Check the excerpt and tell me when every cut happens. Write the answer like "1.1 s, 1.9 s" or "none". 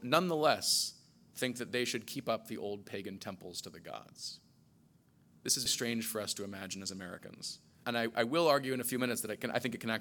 5.7 s, 7.8 s